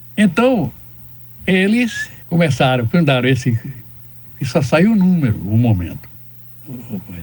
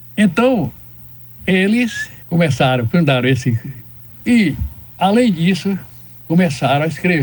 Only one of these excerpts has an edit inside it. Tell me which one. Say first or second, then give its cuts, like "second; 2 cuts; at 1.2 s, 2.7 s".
second; 1 cut; at 4.1 s